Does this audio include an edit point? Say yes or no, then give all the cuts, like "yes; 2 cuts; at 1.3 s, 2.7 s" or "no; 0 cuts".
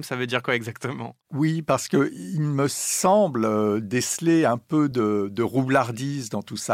no; 0 cuts